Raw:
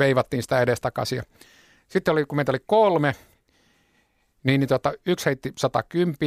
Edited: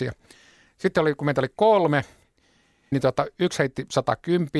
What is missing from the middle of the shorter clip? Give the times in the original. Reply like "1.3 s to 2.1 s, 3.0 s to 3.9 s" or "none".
4.0 s to 4.6 s